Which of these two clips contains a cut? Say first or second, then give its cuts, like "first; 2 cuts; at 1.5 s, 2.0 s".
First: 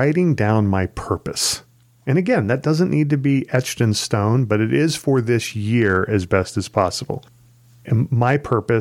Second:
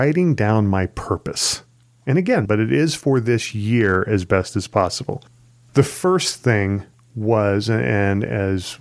second; 2 cuts; at 2.4 s, 5.7 s